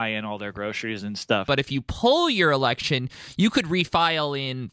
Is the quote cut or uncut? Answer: cut